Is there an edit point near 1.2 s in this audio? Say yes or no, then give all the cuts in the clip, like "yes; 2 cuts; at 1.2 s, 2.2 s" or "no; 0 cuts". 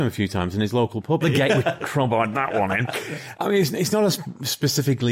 yes; 2 cuts; at 1.2 s, 3.3 s